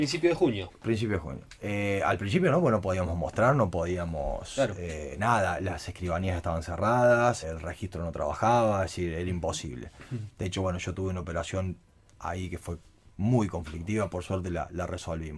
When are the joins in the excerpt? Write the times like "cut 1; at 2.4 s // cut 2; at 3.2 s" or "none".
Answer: cut 1; at 7.4 s